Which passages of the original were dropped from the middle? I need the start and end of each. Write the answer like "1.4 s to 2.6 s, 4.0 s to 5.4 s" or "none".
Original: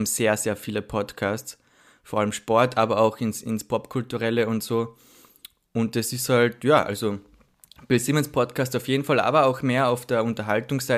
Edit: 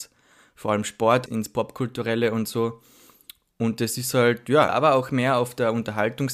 2.7 s to 3.4 s, 6.8 s to 9.2 s